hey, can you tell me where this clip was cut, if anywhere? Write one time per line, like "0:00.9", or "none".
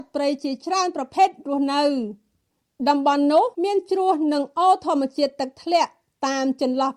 0:03.5